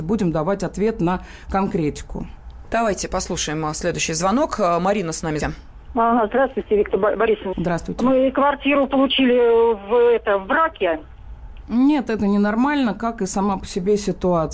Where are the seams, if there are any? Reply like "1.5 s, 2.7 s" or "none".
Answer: 5.4 s, 7.5 s, 11.6 s

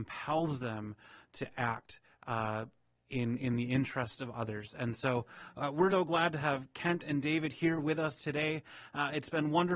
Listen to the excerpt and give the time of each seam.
5.9 s

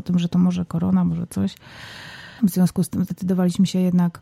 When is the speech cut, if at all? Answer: 2.4 s

